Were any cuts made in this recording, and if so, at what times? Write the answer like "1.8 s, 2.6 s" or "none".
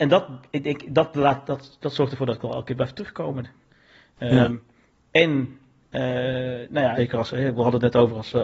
7.0 s